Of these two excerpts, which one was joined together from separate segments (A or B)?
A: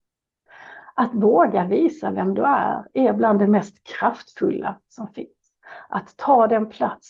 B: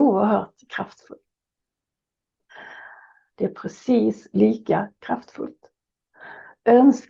B